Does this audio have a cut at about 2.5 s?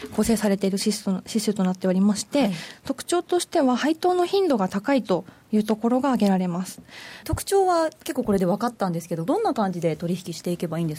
no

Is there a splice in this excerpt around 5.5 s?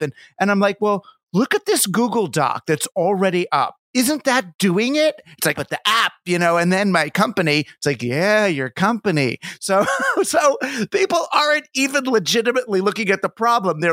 yes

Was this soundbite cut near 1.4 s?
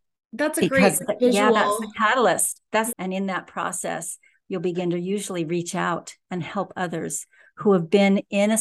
no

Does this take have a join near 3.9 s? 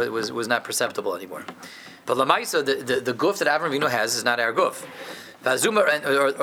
no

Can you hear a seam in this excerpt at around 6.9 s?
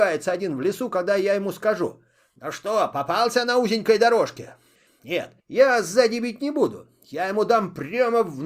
no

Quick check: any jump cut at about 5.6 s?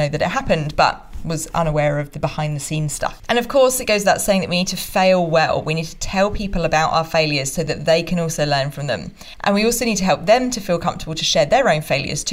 no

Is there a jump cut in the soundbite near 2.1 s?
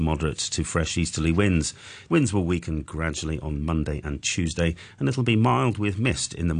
yes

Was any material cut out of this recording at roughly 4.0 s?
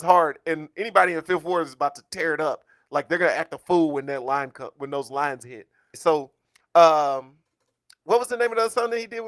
no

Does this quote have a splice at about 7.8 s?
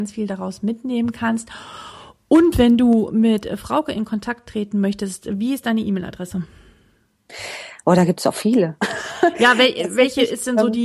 no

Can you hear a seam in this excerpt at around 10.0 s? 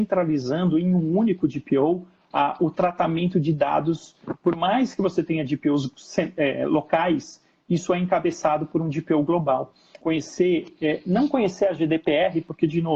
yes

